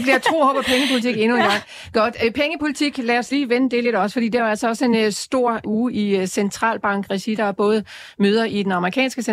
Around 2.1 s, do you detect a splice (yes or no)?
no